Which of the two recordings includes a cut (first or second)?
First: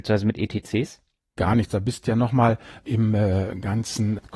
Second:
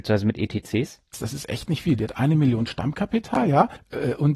second